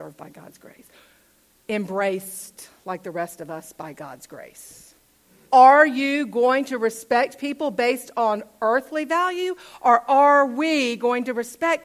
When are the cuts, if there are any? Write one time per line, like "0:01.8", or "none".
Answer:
0:05.5